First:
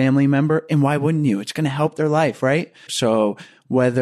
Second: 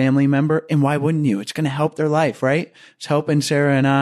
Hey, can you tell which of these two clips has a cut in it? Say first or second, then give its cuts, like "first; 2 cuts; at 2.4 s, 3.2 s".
first; 1 cut; at 2.9 s